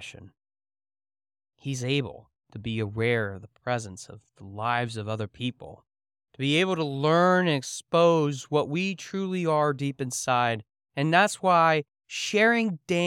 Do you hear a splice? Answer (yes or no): yes